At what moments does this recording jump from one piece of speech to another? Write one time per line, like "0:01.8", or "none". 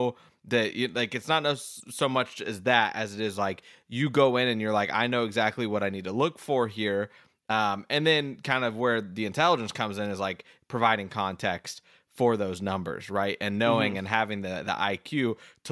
none